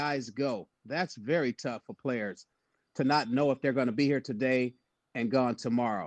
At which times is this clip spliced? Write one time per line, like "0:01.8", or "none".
none